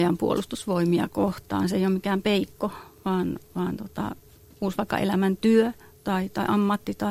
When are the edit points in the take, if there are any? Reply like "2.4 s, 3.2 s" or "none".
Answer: 4.5 s